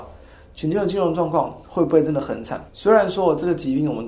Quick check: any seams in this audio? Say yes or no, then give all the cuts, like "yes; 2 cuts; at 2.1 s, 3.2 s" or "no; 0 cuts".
yes; 1 cut; at 2.7 s